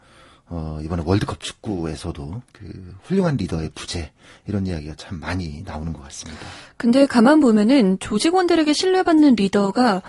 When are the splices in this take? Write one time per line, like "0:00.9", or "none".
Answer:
none